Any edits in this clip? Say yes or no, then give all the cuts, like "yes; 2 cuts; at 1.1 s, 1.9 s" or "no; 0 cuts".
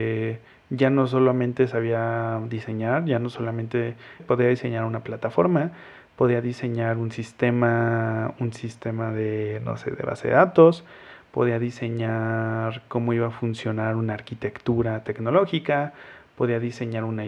yes; 1 cut; at 4.2 s